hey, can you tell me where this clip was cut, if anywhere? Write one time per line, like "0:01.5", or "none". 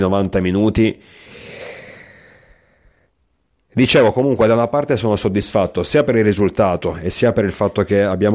none